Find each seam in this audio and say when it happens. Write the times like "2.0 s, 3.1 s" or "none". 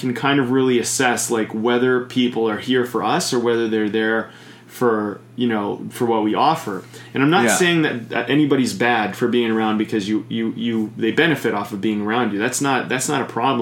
none